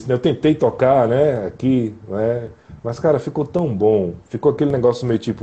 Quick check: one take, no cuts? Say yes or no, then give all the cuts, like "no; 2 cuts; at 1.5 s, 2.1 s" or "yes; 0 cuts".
yes; 0 cuts